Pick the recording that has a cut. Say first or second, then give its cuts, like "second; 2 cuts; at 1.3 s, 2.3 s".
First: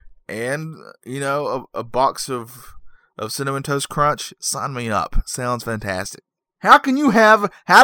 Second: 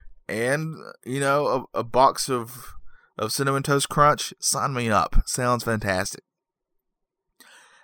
first; 1 cut; at 6.6 s